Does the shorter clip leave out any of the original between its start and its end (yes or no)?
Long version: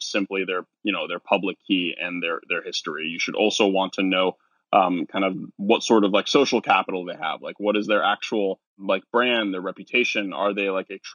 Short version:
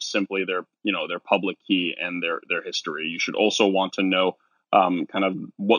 no